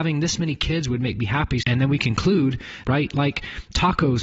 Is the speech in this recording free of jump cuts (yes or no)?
no